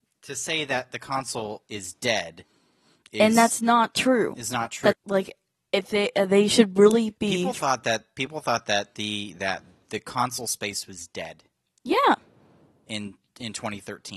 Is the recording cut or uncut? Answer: cut